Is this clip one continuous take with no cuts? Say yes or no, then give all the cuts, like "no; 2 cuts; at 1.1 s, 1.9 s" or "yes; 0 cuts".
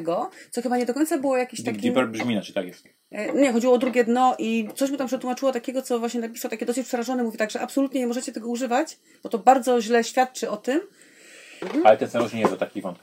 no; 1 cut; at 11.6 s